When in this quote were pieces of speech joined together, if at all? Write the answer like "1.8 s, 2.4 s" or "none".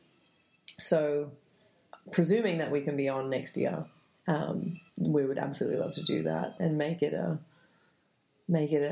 4.9 s, 6.6 s

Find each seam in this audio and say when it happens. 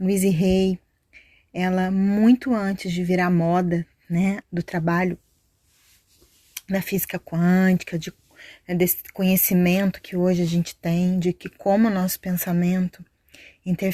4.4 s

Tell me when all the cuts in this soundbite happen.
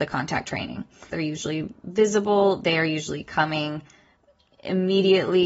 1.1 s

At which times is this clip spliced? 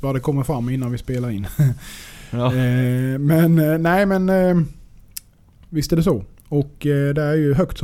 none

